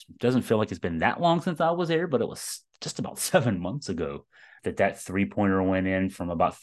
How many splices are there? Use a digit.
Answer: 1